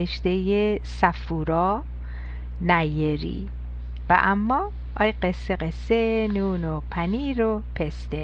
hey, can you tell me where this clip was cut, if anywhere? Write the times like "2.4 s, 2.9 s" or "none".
5.6 s